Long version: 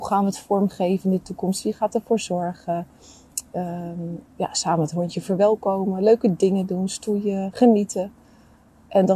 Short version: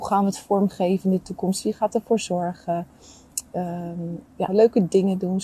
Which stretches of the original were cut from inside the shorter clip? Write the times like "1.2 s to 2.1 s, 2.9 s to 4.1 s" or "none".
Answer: 4.5 s to 6.0 s